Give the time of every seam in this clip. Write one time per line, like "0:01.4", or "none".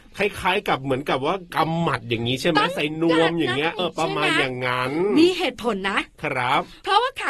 0:03.8